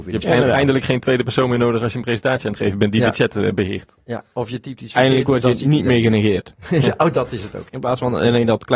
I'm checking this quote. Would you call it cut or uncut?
cut